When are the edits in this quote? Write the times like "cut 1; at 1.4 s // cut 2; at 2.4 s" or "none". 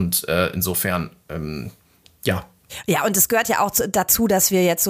none